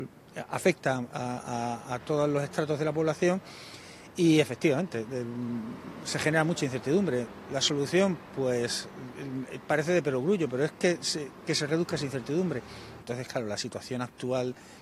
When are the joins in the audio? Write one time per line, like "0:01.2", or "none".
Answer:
0:13.0